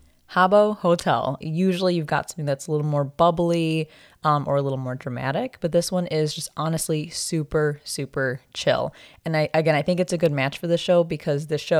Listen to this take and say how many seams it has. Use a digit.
1